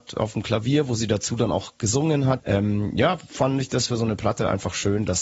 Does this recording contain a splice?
yes; 1 cut; at 2.4 s

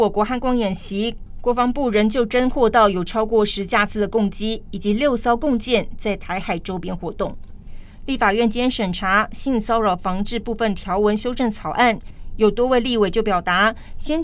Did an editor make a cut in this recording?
no; 0 cuts

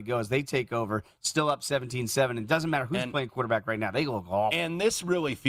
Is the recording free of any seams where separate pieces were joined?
yes; 0 cuts

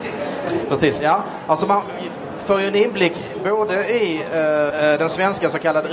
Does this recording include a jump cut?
yes; 1 cut; at 4.7 s

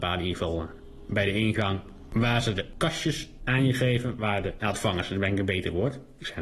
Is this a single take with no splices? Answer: yes; 0 cuts

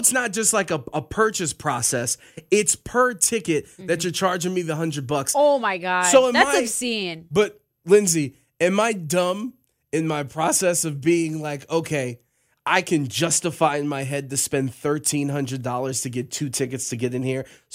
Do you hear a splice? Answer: no; 0 cuts

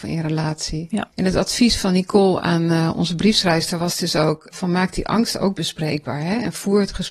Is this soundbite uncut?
yes; 0 cuts

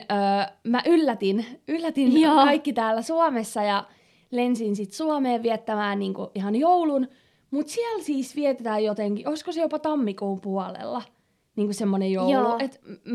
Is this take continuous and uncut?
yes; 0 cuts

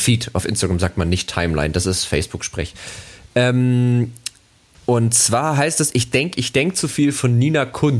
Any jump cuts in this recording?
no; 0 cuts

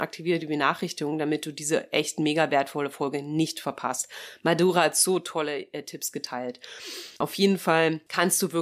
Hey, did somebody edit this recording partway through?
no; 0 cuts

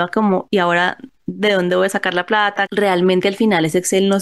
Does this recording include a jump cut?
yes; 1 cut; at 2.7 s

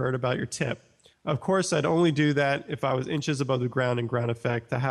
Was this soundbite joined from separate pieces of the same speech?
yes; 1 cut; at 1.1 s

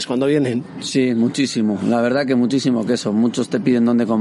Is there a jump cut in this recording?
no; 0 cuts

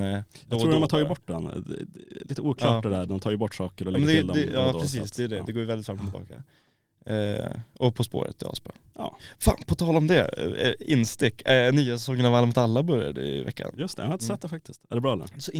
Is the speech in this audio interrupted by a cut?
no; 0 cuts

